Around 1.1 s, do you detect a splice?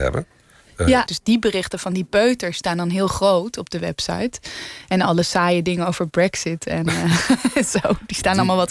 yes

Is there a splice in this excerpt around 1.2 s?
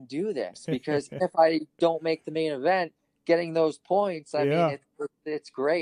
yes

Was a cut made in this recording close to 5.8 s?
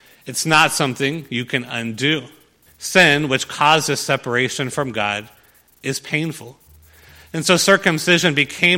no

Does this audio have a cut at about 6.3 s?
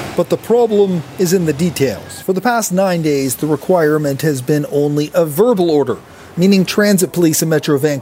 yes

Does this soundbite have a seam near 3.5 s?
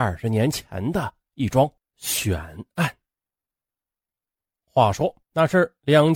no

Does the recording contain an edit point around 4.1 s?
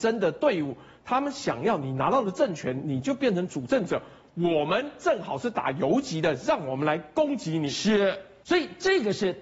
no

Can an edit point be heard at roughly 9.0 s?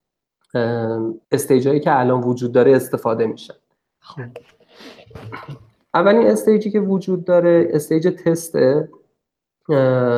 no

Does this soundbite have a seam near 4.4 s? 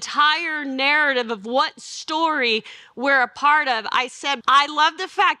yes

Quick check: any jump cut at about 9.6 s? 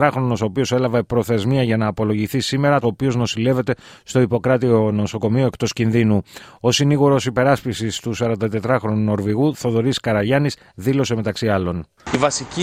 no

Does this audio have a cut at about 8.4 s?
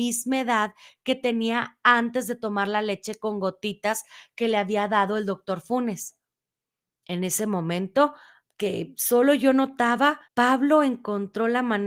yes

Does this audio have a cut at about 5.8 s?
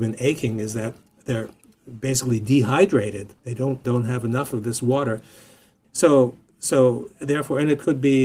yes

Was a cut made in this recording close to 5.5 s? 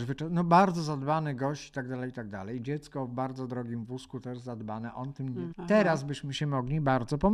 yes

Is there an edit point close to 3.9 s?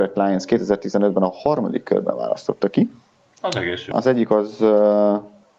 yes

